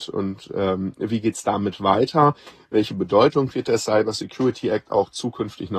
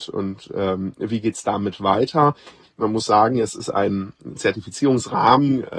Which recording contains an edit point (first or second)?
second